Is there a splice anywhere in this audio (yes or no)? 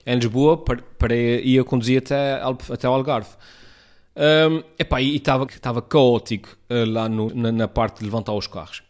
yes